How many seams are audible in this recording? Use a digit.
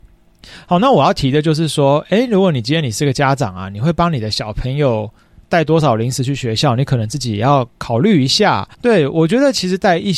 1